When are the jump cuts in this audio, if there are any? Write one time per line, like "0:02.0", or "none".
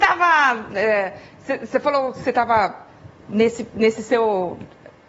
none